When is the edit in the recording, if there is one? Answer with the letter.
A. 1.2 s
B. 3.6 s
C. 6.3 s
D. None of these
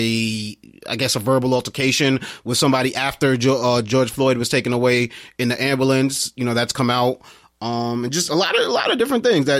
D